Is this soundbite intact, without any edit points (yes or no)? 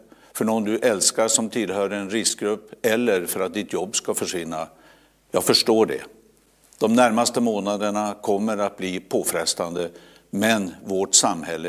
yes